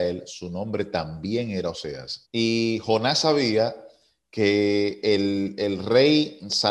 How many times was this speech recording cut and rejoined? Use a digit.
1